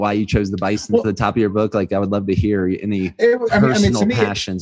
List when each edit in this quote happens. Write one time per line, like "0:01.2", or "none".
none